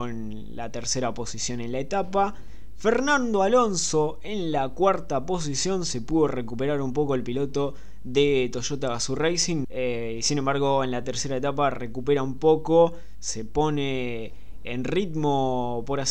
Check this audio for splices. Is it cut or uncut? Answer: cut